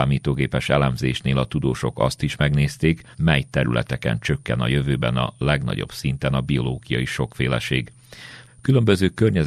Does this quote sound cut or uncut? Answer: cut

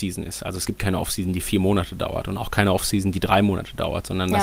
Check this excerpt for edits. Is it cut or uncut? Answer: uncut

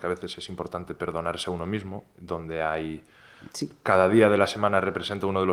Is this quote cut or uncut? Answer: uncut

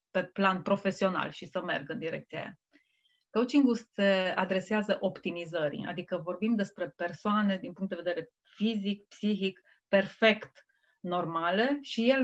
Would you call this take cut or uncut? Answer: uncut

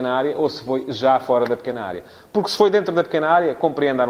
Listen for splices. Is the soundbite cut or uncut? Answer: uncut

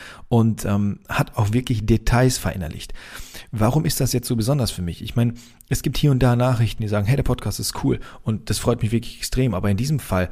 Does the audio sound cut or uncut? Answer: cut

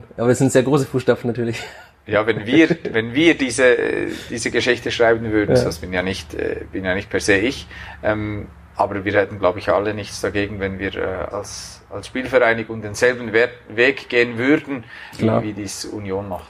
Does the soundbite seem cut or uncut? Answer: cut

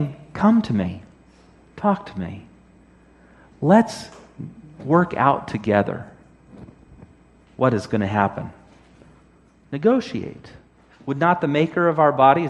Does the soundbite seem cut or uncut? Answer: cut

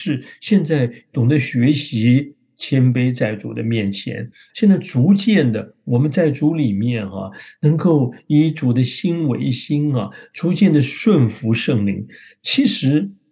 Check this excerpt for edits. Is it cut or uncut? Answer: cut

